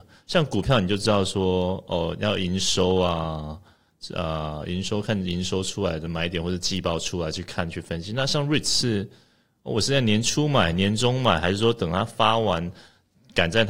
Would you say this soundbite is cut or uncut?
uncut